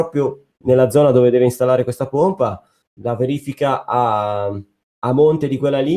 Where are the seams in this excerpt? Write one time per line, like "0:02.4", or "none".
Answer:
none